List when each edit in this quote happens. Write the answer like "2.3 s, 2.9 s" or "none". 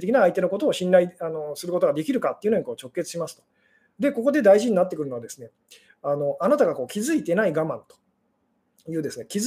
none